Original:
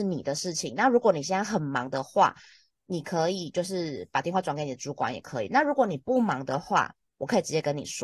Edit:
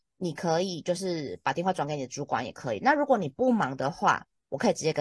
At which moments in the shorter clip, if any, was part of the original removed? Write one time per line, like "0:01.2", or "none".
none